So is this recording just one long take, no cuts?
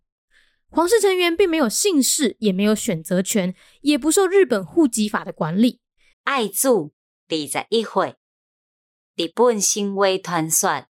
no; 1 cut; at 6.1 s

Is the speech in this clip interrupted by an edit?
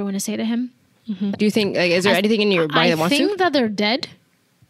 yes; 1 cut; at 1.3 s

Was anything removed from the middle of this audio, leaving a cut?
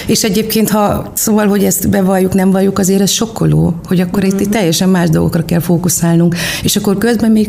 no; 0 cuts

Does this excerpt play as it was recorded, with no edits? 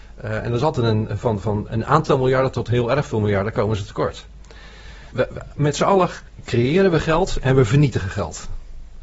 no; 1 cut; at 5.1 s

